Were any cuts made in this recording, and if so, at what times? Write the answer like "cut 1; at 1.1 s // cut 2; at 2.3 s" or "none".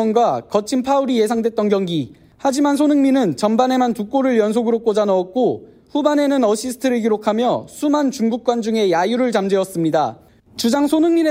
cut 1; at 10.4 s